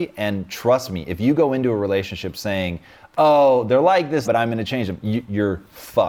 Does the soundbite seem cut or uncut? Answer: cut